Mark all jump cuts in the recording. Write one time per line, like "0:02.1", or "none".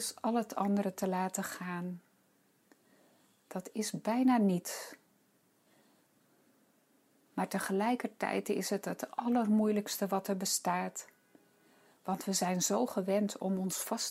none